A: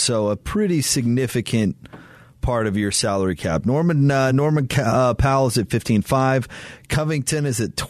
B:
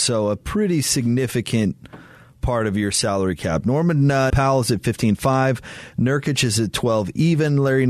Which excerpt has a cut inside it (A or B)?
B